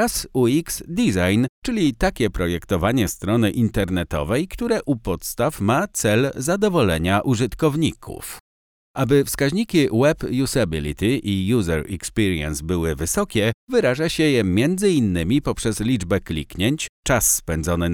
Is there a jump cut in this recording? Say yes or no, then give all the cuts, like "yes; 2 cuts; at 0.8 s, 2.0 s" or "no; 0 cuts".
no; 0 cuts